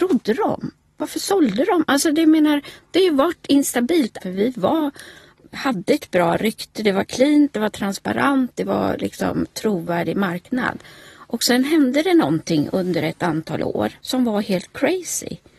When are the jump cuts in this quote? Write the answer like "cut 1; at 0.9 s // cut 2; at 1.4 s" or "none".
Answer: cut 1; at 4.2 s // cut 2; at 14.0 s